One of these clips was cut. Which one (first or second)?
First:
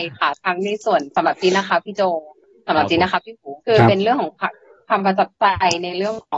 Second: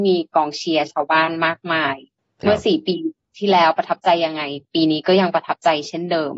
first